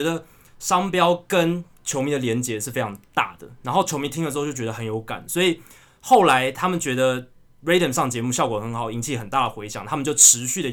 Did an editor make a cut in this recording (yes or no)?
no